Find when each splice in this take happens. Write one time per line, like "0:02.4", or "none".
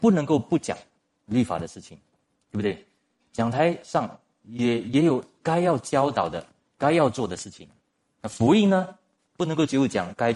0:09.3